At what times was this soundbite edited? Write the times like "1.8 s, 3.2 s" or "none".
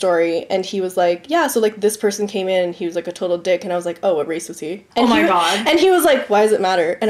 4.9 s